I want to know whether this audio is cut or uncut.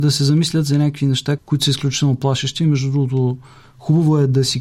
cut